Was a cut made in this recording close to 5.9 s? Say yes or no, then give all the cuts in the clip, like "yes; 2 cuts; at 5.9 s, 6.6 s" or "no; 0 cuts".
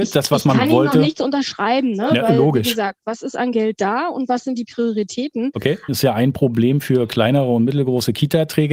yes; 1 cut; at 5.9 s